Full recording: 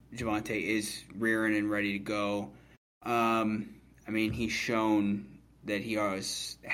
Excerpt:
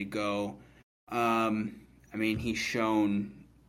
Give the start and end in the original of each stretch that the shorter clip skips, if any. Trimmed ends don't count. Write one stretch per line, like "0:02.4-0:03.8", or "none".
none

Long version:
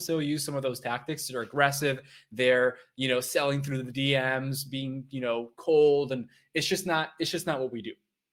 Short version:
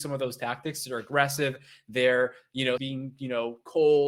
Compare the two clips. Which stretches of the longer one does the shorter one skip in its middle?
0:03.2-0:04.7

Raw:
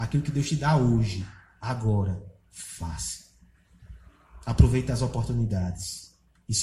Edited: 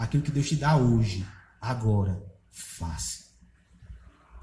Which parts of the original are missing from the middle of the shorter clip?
none

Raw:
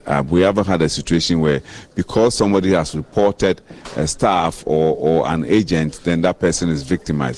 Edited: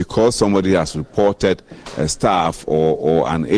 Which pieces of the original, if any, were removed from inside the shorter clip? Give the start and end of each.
none

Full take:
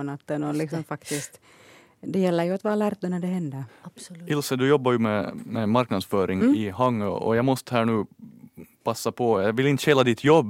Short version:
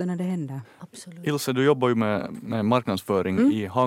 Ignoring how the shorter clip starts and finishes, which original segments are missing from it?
none

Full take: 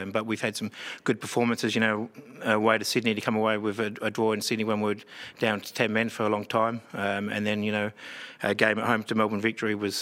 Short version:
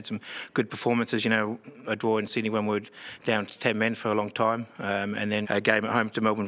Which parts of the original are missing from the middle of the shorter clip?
0:02.4-0:04.0
0:07.6-0:08.4

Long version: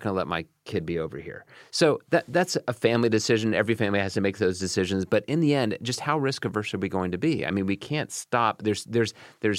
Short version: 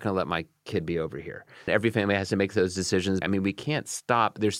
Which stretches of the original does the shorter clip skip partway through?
0:01.7-0:03.5
0:05.1-0:07.5

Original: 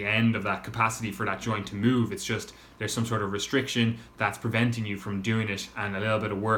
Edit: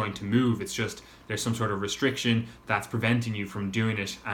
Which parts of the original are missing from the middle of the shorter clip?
none

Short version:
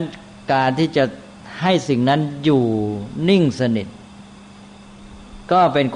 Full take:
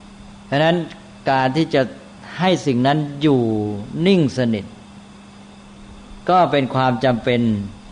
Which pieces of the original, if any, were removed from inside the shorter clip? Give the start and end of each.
none

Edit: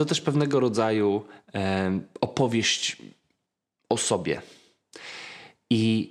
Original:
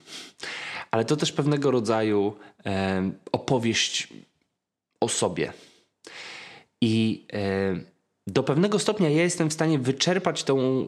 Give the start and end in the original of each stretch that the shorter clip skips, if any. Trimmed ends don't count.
none

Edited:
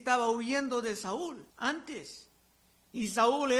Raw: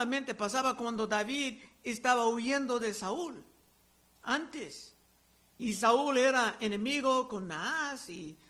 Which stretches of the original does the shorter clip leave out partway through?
0:03.5-0:04.1

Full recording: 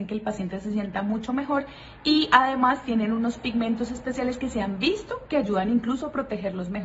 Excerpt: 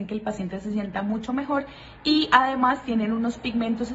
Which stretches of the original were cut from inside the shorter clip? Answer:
none

